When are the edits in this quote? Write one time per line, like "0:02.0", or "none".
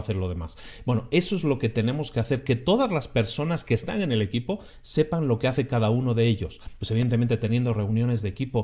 0:06.8